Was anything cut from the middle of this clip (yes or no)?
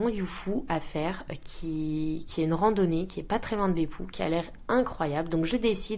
no